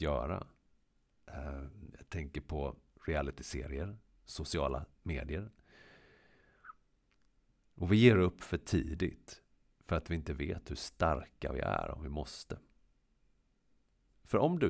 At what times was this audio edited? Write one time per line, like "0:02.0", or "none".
none